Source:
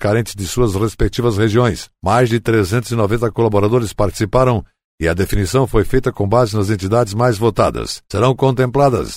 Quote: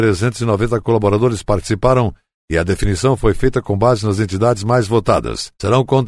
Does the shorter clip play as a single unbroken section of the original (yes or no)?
yes